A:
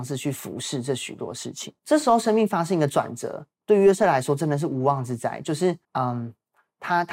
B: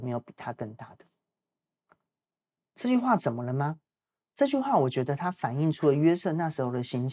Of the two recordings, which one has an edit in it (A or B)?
A